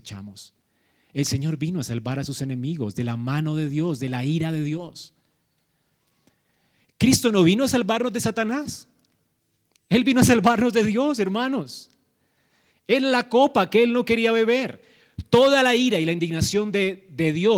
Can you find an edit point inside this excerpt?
no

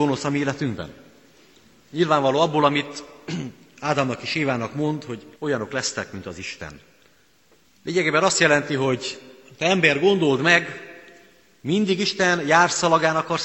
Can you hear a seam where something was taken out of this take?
yes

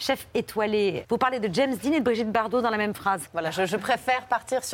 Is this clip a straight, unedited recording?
no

